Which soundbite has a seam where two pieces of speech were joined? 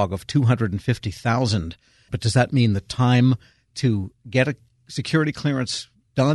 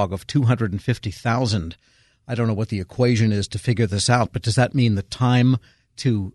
first; 1 cut; at 2.1 s

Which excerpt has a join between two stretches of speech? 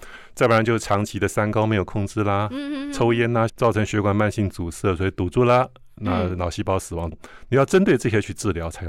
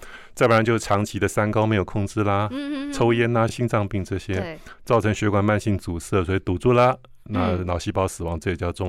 first; 2 cuts; at 3.5 s, 7.1 s

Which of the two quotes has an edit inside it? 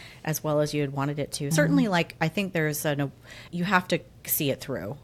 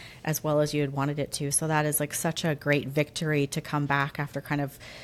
first; 2 cuts; at 1.5 s, 3.5 s

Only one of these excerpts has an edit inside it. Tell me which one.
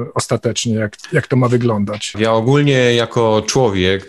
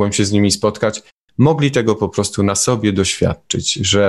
first; 1 cut; at 2.1 s

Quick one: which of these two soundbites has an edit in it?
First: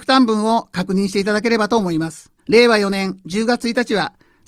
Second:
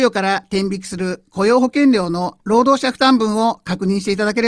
first; 1 cut; at 2.4 s

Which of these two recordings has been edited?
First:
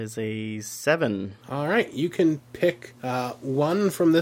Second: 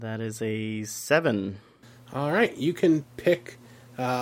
first; 2 cuts; at 1.4 s, 3.0 s

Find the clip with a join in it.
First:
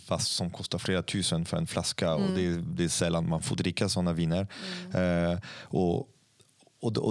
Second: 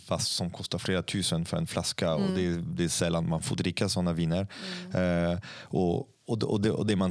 second; 1 cut; at 6.1 s

